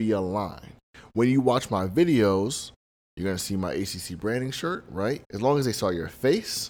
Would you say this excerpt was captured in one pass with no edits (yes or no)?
no